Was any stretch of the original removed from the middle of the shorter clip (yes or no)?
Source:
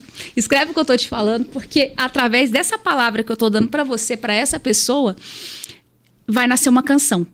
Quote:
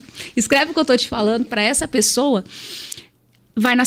yes